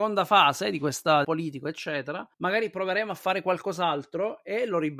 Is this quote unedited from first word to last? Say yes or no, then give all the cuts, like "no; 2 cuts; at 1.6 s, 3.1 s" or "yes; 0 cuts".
no; 2 cuts; at 1.2 s, 2.3 s